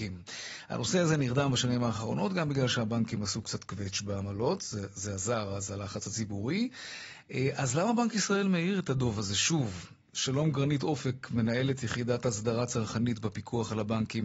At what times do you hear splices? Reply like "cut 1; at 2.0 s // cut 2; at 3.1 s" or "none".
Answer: none

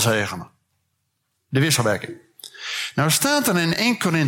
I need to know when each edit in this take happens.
none

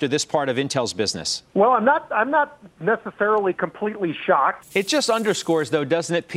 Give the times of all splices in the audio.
cut 1; at 1.5 s // cut 2; at 4.6 s

